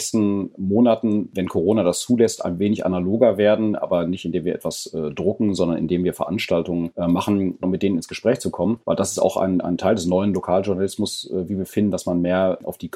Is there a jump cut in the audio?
yes; 1 cut; at 7.6 s

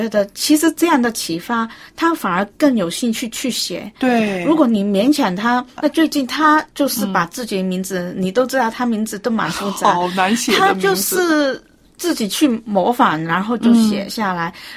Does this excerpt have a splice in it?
yes; 1 cut; at 5.8 s

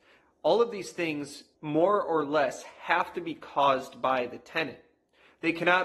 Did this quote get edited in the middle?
yes; 1 cut; at 1.5 s

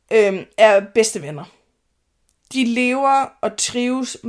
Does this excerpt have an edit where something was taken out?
no; 0 cuts

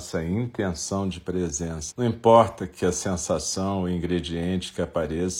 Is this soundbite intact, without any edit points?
no; 1 cut; at 1.9 s

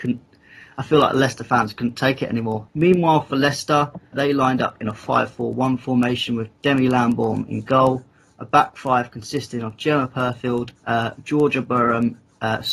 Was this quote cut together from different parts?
yes; 3 cuts; at 2.7 s, 4.1 s, 10.8 s

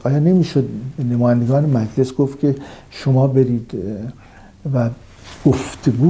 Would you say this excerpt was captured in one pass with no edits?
yes; 0 cuts

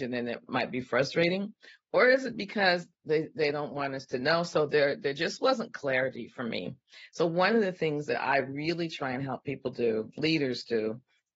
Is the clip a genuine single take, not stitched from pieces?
yes; 0 cuts

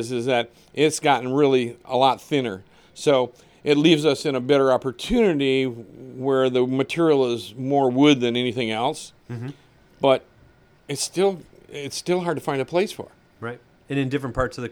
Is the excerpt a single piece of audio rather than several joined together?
yes; 0 cuts

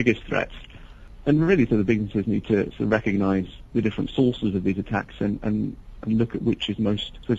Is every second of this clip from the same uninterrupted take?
yes; 0 cuts

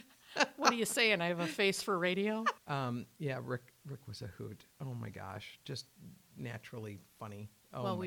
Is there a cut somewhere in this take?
yes; 1 cut; at 2.6 s

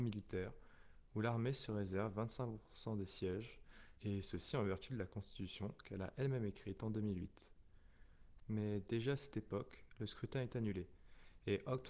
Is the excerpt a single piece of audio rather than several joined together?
no; 2 cuts; at 4.0 s, 8.4 s

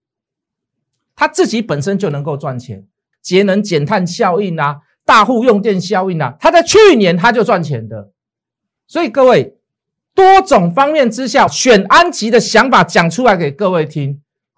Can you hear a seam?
yes; 2 cuts; at 3.1 s, 11.5 s

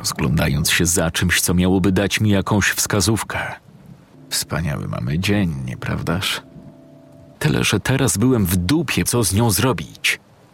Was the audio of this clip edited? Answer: yes; 3 cuts; at 4.1 s, 7.3 s, 9.1 s

